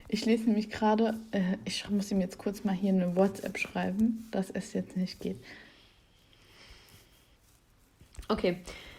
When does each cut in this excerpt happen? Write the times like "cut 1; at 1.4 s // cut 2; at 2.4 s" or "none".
none